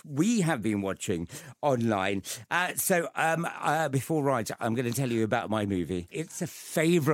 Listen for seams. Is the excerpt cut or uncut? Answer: uncut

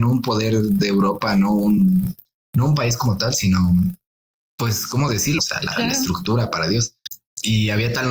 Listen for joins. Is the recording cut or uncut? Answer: cut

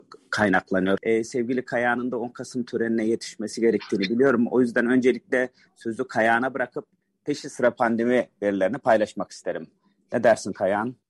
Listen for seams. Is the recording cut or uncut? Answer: cut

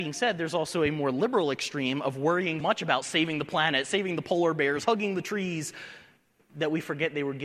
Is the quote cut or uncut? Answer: cut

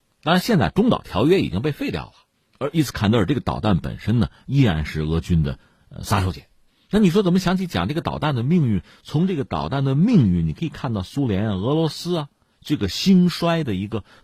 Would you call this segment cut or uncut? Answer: uncut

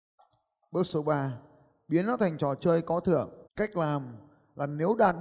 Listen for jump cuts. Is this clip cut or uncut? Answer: cut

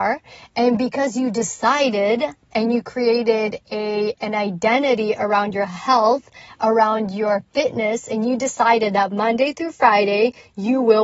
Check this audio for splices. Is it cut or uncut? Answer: uncut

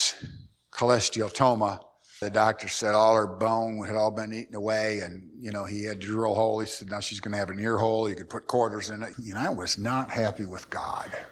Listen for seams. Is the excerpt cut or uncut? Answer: cut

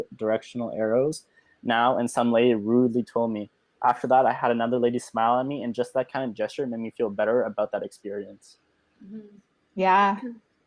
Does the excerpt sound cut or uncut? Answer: uncut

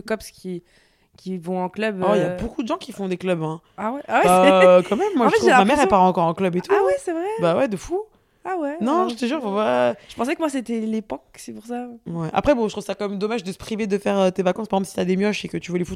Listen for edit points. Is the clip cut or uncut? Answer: uncut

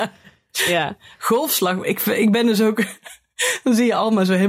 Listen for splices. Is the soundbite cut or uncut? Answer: uncut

